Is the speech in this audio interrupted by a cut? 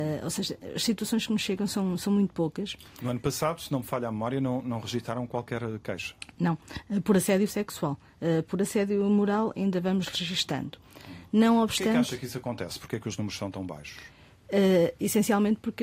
no; 0 cuts

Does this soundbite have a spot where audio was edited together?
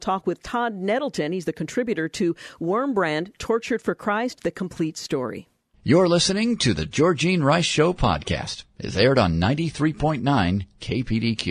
no; 0 cuts

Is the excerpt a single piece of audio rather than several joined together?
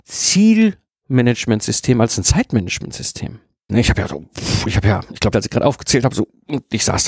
no; 2 cuts; at 3.7 s, 5.3 s

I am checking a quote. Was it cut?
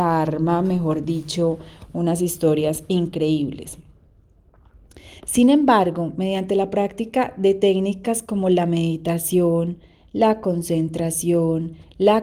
no; 0 cuts

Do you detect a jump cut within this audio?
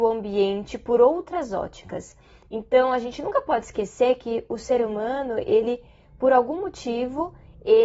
no; 0 cuts

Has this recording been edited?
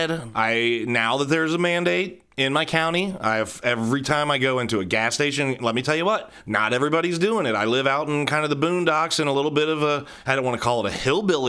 no; 0 cuts

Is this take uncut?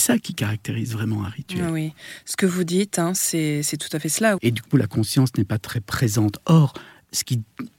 no; 1 cut; at 4.4 s

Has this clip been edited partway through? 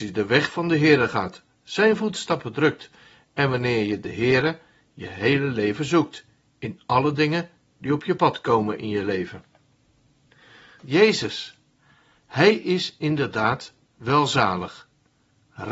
yes; 1 cut; at 10.8 s

